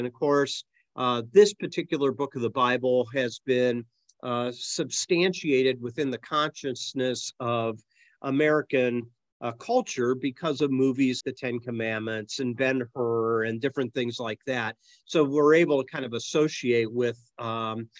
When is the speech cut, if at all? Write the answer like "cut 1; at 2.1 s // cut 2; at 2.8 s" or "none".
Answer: cut 1; at 11.2 s